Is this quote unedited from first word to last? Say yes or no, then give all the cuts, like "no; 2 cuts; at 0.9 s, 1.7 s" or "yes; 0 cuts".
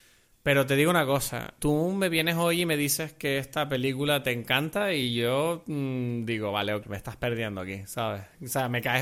no; 2 cuts; at 1.6 s, 6.8 s